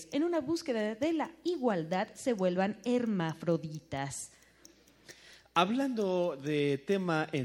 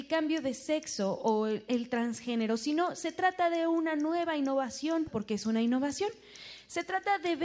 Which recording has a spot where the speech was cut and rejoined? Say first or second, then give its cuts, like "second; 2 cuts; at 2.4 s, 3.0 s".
second; 1 cut; at 5.1 s